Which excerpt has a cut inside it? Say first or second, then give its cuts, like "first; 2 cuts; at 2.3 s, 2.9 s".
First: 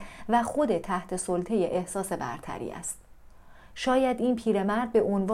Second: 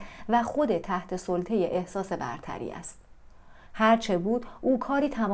second; 1 cut; at 3.7 s